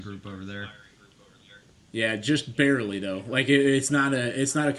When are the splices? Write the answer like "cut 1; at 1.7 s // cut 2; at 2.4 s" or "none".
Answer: none